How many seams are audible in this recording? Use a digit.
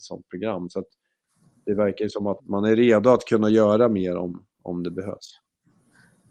1